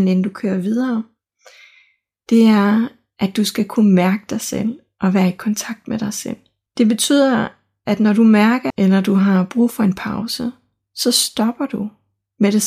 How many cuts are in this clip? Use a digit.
2